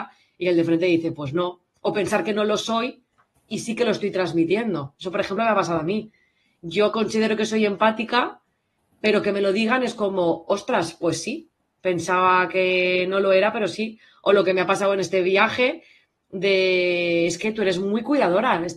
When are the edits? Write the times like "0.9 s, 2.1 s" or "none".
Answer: none